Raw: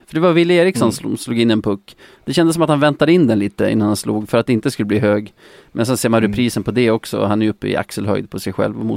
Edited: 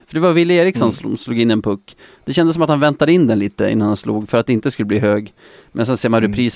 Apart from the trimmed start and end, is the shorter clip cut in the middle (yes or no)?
no